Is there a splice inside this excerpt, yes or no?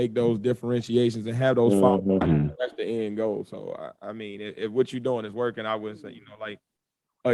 yes